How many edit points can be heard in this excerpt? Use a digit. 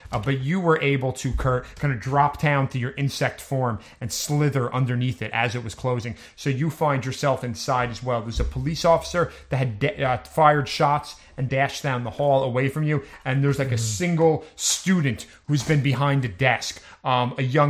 1